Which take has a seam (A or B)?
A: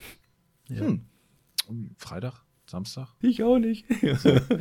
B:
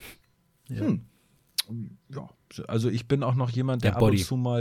A